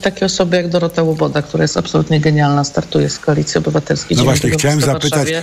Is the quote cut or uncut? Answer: uncut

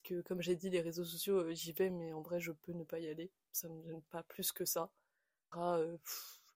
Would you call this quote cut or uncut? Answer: cut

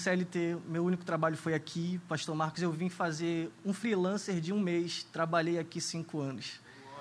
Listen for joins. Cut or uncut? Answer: uncut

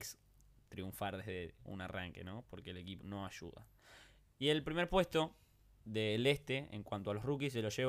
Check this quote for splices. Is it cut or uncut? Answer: cut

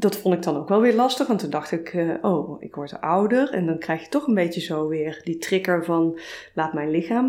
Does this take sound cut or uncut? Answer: uncut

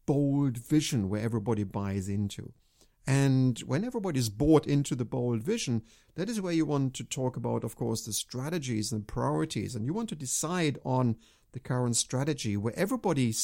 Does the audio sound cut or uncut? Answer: uncut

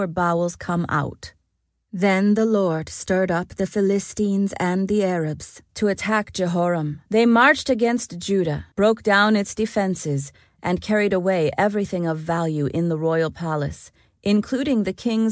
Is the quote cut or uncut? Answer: cut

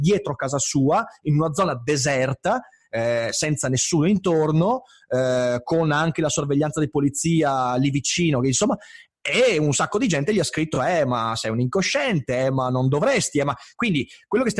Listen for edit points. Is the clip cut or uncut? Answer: uncut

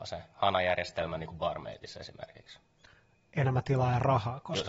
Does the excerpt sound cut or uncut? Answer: uncut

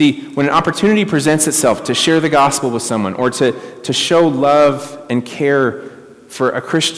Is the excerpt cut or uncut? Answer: uncut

